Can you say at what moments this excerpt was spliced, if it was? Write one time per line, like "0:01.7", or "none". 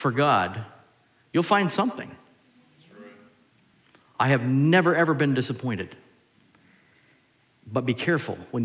none